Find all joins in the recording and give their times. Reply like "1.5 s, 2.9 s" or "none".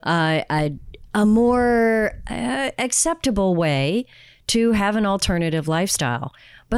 none